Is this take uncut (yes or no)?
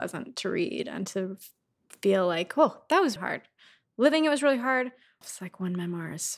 no